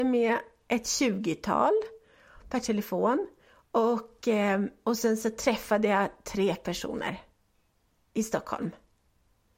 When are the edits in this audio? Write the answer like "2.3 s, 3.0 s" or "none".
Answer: none